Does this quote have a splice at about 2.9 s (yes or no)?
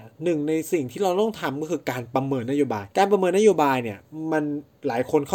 yes